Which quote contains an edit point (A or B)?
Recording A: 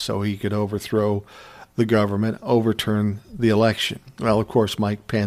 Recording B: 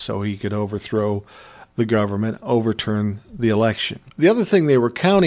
B